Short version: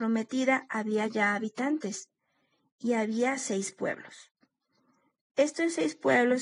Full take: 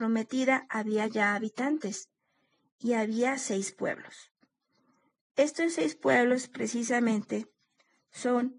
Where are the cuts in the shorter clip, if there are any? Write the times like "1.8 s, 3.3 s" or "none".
none